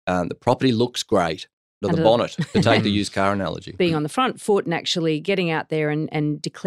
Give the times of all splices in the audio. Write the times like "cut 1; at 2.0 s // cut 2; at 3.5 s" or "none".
cut 1; at 1.8 s